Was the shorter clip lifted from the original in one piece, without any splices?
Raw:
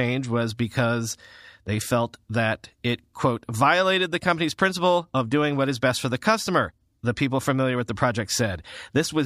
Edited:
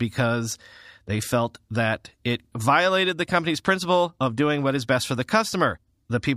no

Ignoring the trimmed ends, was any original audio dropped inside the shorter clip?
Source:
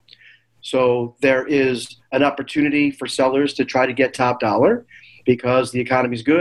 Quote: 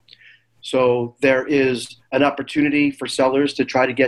no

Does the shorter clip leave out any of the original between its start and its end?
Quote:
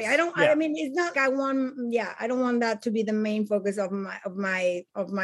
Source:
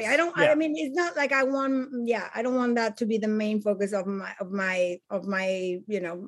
yes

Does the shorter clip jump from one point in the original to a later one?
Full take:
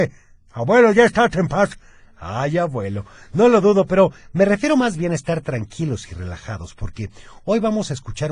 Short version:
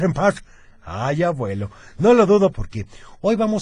yes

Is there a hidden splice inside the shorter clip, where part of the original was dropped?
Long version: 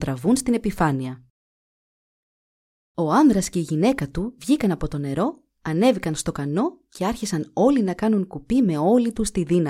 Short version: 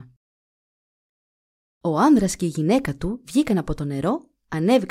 no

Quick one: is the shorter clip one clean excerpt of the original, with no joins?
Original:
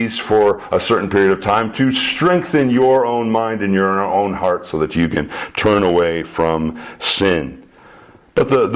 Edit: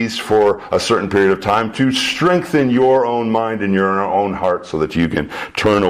yes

